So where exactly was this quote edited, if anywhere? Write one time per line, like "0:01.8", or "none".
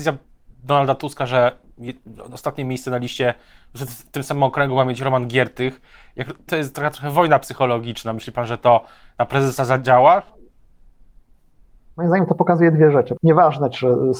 0:06.5
0:13.2